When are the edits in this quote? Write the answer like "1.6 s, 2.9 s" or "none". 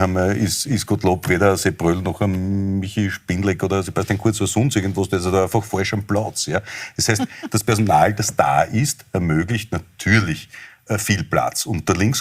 none

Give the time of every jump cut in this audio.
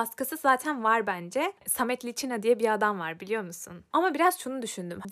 1.6 s, 3.9 s

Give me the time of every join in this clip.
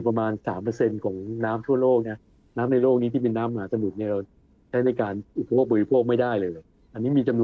5.3 s

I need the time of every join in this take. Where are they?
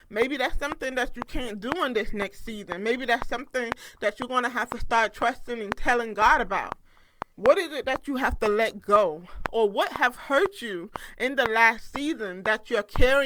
7.3 s

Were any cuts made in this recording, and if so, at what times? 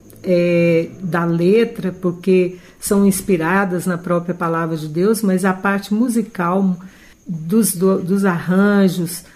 7.7 s

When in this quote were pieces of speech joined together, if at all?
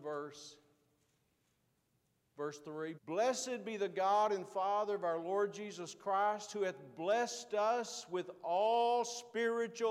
2.9 s

